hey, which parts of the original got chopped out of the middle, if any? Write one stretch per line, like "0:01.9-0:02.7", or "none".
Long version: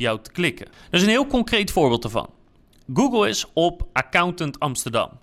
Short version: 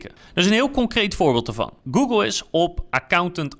0:02.4-0:02.8